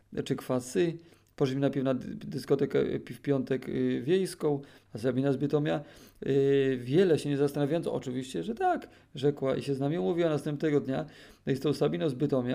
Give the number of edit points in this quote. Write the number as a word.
one